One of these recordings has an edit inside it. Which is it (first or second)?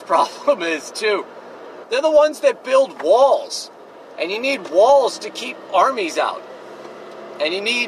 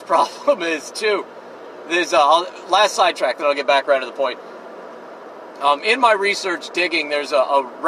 first